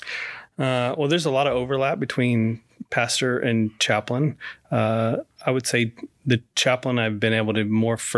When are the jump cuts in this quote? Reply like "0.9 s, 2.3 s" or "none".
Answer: none